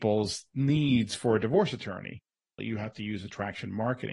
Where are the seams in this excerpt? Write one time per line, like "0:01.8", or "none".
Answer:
0:02.6